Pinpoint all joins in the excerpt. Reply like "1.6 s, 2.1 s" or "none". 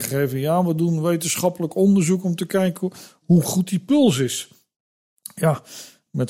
none